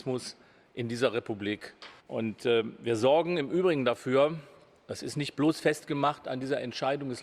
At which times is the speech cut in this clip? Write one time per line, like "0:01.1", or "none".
0:02.0